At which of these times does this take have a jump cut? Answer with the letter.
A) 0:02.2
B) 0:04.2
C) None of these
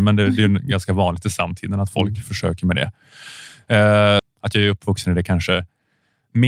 B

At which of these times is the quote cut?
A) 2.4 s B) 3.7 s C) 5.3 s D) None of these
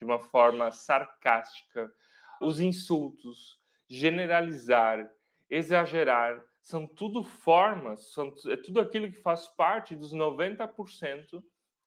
A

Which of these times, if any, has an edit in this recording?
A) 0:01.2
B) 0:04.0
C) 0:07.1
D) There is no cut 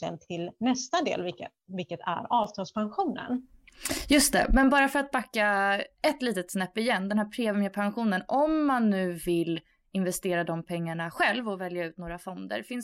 D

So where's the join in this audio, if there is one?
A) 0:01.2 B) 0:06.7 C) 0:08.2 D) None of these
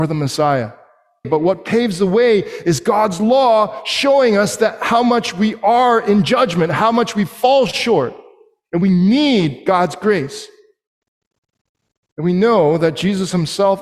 A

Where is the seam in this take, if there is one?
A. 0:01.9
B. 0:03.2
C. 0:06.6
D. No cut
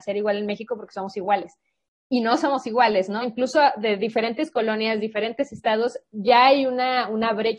B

